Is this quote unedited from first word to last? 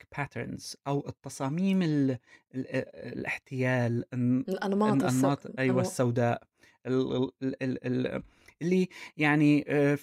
yes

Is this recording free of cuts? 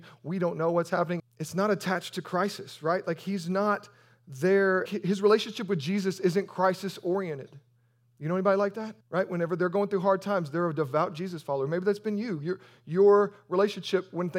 no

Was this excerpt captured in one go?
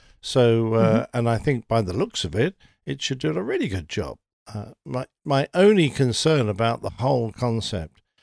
yes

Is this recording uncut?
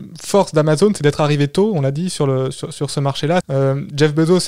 no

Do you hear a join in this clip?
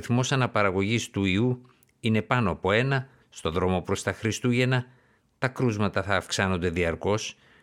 yes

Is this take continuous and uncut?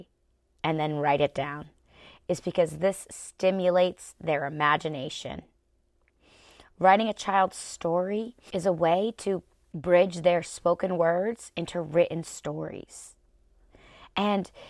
yes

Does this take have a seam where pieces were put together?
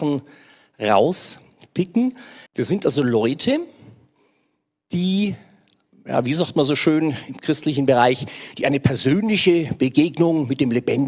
yes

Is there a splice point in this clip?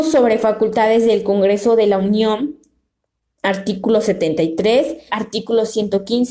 yes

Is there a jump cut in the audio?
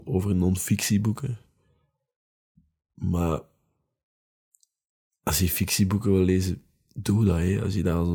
no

